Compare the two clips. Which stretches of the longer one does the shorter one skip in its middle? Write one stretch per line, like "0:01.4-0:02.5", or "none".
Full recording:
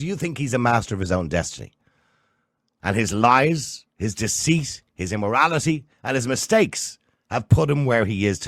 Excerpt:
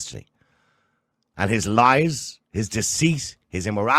none